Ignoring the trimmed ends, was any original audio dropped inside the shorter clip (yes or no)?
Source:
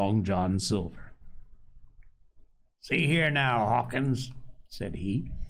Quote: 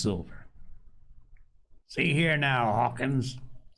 yes